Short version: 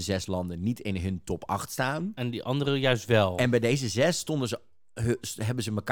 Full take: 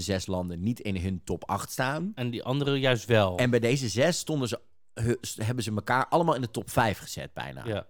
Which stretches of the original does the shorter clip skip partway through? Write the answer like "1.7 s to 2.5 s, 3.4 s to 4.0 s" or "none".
none